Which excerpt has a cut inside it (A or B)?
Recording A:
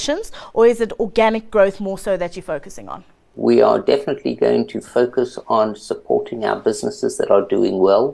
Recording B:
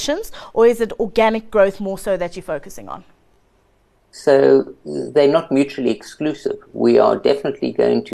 A